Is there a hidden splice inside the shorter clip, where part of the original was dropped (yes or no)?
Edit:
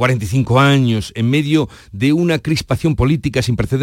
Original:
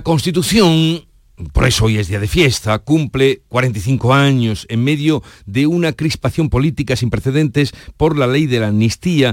no